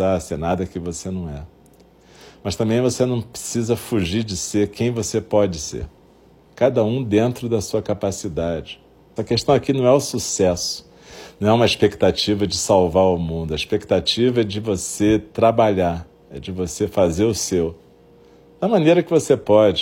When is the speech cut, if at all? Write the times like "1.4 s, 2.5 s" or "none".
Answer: 6.4 s, 9.2 s